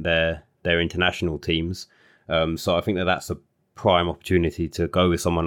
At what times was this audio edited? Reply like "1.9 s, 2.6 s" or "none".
none